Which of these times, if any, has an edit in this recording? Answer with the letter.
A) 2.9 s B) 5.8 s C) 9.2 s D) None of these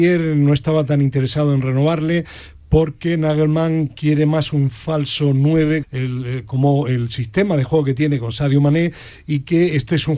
B